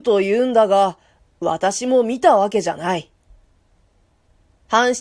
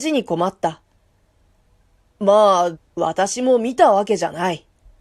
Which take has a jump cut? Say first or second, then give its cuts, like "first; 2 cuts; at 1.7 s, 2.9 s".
second; 1 cut; at 2.7 s